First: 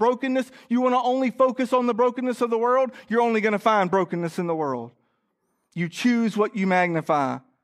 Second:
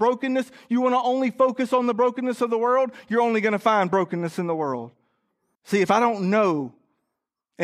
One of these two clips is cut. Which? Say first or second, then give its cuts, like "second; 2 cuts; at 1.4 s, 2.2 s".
second; 1 cut; at 5.5 s